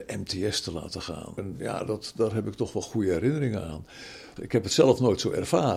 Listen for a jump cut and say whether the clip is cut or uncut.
cut